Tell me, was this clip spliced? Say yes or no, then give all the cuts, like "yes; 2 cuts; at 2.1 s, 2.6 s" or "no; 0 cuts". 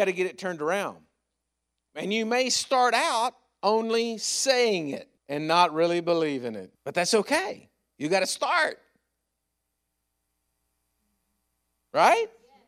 yes; 2 cuts; at 5.2 s, 6.8 s